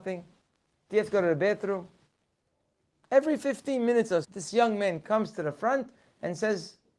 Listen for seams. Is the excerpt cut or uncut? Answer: cut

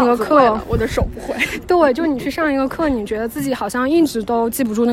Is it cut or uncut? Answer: uncut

